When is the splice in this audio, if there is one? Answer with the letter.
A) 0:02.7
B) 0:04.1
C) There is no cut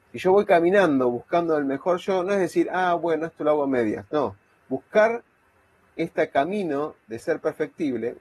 C